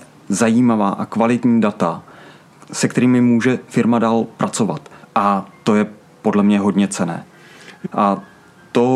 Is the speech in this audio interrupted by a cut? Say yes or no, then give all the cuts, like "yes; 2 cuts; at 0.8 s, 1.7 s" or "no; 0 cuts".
yes; 2 cuts; at 5.0 s, 7.8 s